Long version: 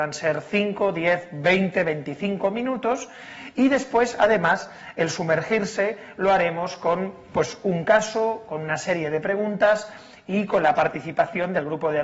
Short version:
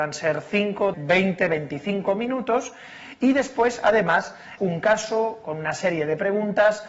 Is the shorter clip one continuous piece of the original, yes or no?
no